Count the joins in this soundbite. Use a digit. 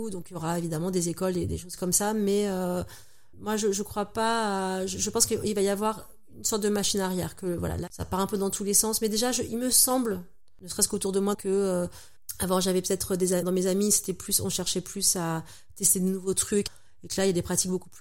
2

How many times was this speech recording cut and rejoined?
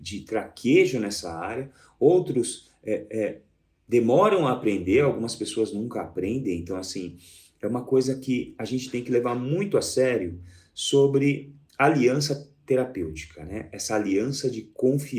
0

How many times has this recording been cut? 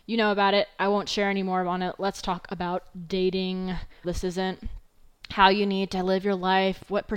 1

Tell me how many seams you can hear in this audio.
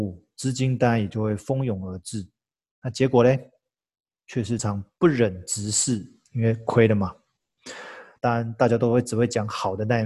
3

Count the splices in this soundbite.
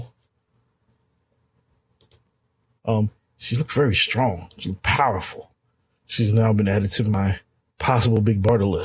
1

